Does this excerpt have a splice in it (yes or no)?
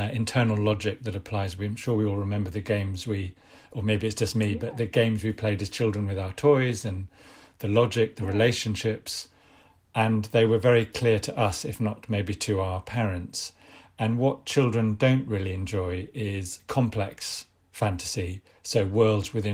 no